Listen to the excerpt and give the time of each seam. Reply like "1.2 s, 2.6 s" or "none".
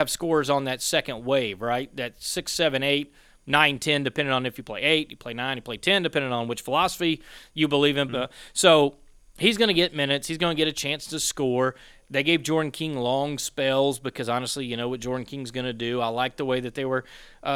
8.1 s